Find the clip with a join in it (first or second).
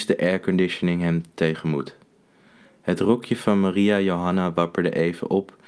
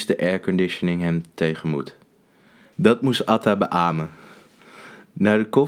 second